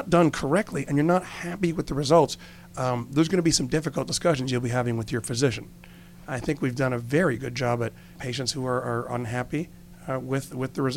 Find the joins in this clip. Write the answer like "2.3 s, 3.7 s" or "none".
6.3 s, 8.2 s